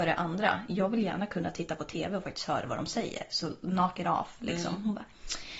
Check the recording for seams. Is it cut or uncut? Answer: uncut